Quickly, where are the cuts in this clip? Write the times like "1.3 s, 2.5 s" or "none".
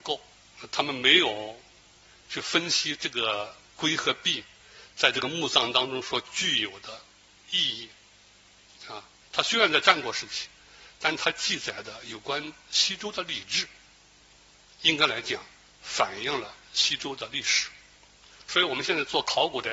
9.2 s